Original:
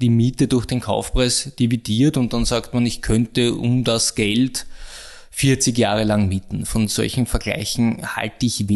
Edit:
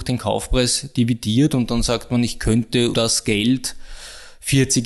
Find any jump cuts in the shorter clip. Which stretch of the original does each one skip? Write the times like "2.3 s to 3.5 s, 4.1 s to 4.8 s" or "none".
3.6 s to 3.8 s

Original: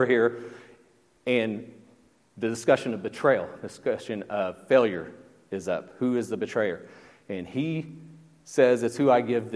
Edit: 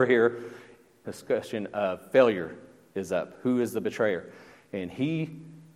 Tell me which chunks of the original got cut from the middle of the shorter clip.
1.0 s to 3.6 s

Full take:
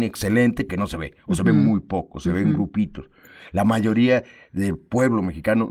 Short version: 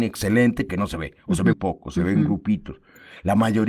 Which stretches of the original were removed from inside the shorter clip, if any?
1.5 s to 1.8 s

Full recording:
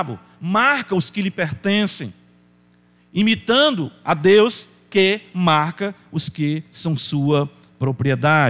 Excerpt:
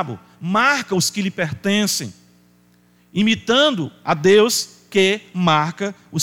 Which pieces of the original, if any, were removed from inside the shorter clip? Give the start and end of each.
none

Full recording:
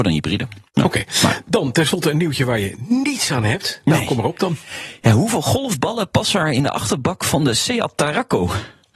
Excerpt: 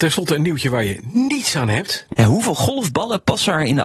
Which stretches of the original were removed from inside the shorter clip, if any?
3.9 s to 5.0 s

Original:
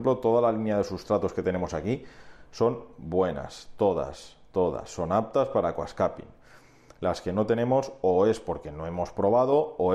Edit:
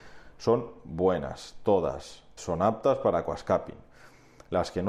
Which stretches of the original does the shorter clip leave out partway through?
4.5 s to 4.9 s

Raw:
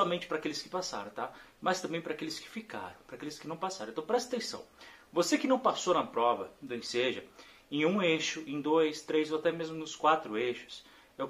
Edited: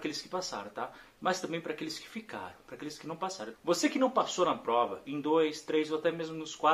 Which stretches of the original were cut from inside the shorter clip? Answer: 3.9 s to 5.0 s, 6.5 s to 8.4 s

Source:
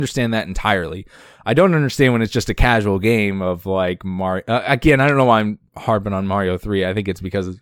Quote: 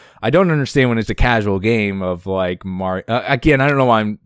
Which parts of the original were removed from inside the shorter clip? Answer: 2.3 s to 2.5 s

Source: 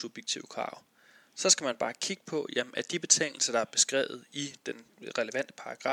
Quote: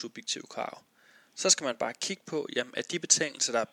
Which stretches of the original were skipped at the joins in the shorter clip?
none

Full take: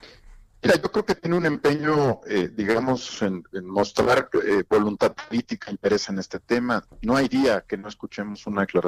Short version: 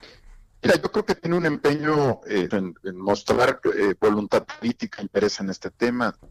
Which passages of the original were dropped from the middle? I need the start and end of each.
2.5 s to 3.2 s

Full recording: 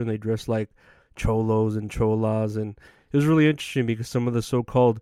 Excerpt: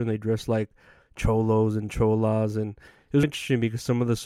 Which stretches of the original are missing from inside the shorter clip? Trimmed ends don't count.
3.2 s to 3.5 s

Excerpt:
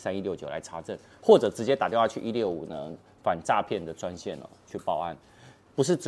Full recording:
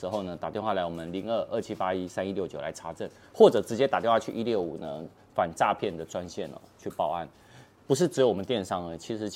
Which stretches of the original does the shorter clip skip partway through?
none

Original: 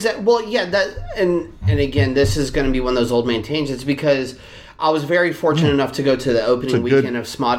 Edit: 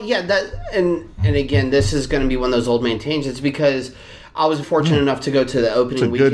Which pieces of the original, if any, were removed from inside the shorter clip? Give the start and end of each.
5.1 s to 5.3 s

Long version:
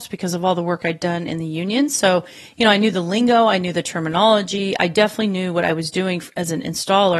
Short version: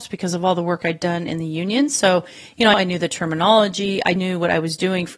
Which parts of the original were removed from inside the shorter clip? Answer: 2.7 s to 3.5 s, 4.9 s to 5.3 s

